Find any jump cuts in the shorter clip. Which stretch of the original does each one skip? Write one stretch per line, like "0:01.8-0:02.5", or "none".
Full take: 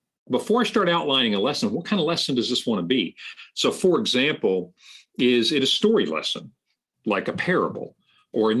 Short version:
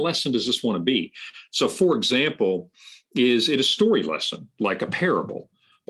0:06.5-0:07.0